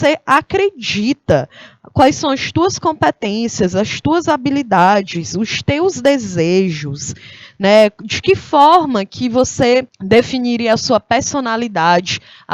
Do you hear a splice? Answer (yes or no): yes